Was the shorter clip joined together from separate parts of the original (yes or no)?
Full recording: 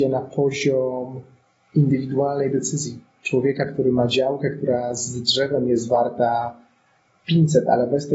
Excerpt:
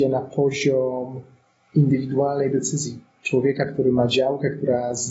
no